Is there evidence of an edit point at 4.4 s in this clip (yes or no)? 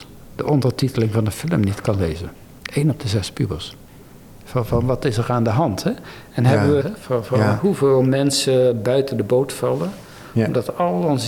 no